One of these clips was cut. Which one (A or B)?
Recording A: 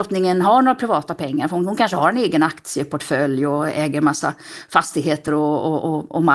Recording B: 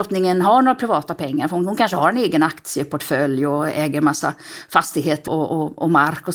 B